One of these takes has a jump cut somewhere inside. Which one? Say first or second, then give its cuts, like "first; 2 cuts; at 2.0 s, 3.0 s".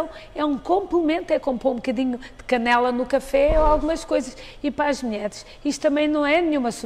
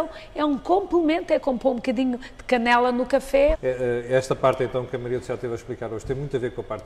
second; 1 cut; at 3.5 s